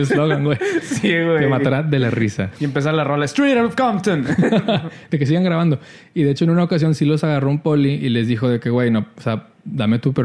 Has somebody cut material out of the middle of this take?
yes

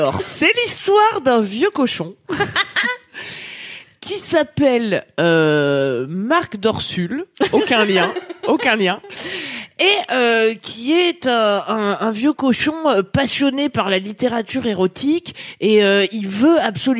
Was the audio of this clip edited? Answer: no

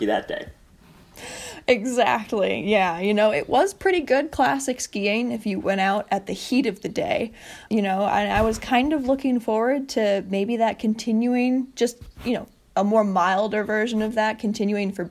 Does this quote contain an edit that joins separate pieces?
no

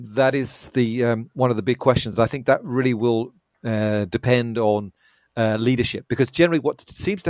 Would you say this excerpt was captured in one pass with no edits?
yes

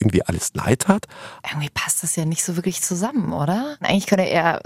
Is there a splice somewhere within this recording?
yes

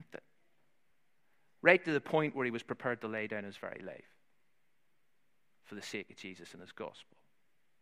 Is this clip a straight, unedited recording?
yes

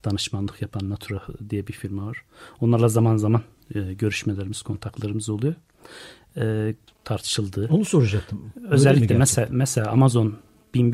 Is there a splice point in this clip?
yes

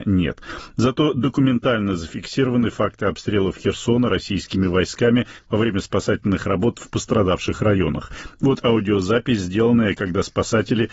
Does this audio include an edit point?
no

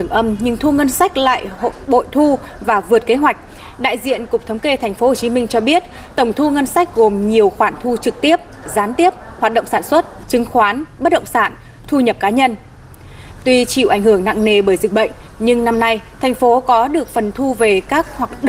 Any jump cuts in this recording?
no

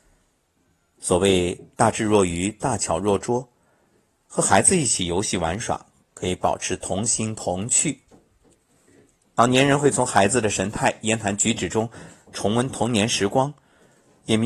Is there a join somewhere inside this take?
no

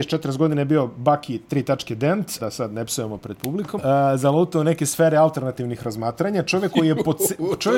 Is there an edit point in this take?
yes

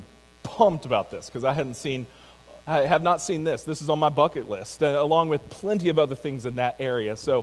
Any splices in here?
no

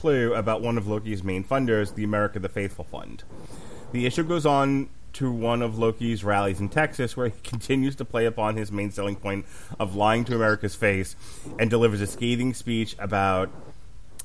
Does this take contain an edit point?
no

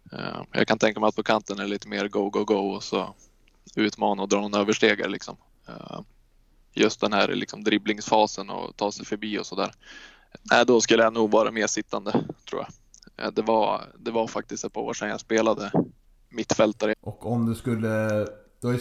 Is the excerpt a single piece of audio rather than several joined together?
no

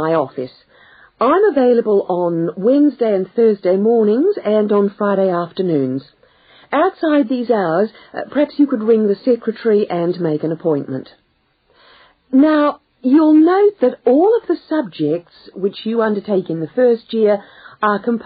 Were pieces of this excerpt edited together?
no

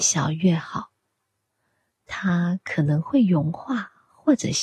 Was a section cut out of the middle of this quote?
no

